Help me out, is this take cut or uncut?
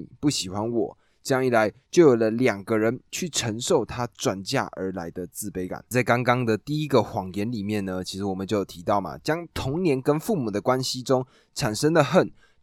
uncut